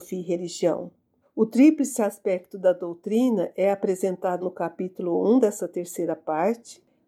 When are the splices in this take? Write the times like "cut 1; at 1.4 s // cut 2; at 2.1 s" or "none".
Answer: cut 1; at 1.2 s // cut 2; at 4.4 s